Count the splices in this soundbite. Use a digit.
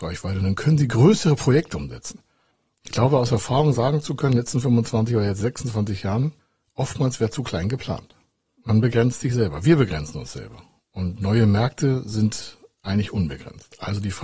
0